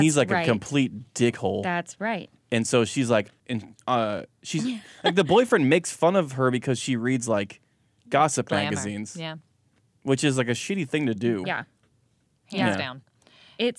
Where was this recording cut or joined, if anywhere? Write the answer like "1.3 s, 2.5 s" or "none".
3.4 s, 11.4 s